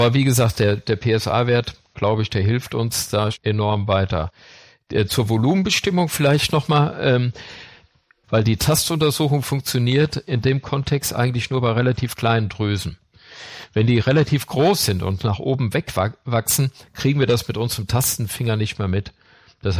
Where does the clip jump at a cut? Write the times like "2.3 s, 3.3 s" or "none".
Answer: 3.3 s, 8.2 s